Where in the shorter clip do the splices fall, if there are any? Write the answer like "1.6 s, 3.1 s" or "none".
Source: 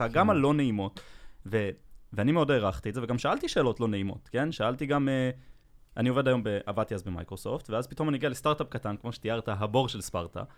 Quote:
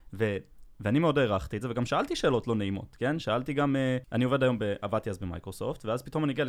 4.0 s

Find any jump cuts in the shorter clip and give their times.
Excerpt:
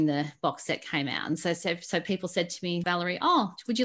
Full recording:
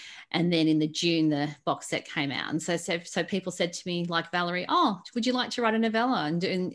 2.8 s

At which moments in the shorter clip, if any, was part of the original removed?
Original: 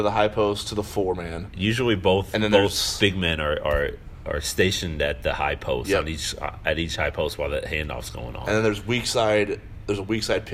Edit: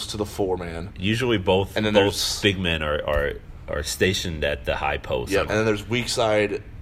5.5 s

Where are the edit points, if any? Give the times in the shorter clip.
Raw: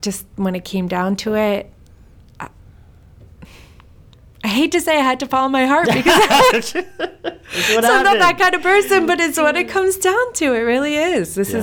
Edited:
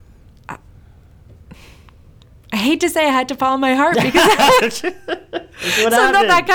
none

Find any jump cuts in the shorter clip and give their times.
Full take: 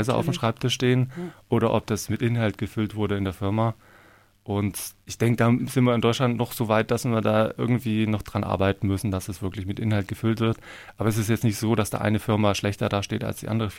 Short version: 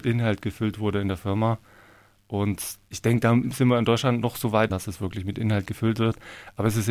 4.7 s

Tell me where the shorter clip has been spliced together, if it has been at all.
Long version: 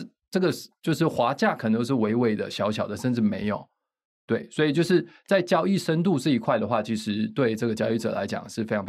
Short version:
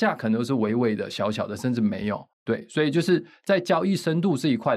2.3 s

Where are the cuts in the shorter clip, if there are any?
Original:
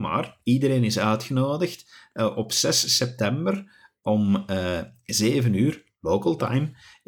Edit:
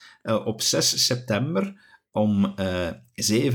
none

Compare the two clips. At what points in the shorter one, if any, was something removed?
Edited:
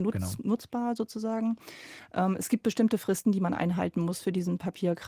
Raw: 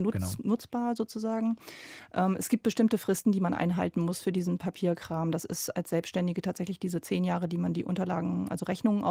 none

